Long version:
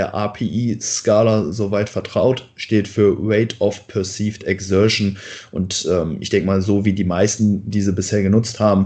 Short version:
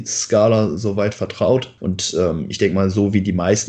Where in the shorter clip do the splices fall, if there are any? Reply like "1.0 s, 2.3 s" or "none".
1.8 s